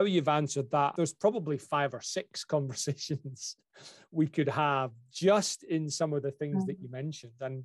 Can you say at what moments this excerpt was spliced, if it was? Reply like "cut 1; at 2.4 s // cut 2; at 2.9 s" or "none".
cut 1; at 0.9 s